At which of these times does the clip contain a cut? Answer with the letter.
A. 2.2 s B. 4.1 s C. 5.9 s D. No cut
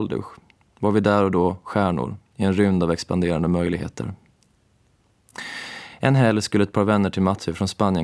D